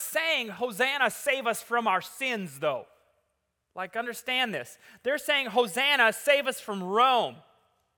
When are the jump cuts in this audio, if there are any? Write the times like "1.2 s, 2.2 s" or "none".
none